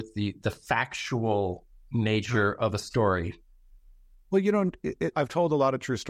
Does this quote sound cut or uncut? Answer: cut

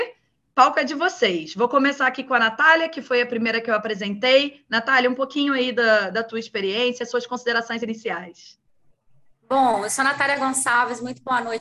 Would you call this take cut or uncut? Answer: uncut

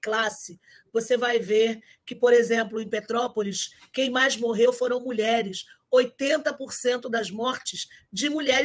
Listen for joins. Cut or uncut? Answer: uncut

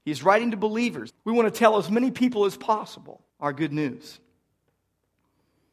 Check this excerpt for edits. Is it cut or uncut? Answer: cut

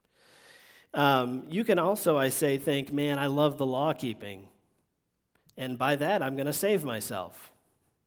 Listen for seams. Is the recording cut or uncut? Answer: uncut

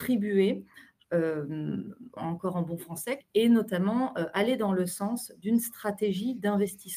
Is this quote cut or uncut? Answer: cut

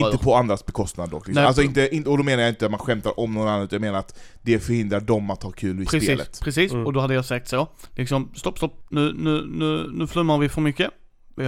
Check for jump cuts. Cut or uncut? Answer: uncut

